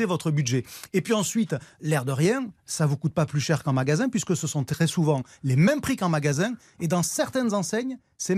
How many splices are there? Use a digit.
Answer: 1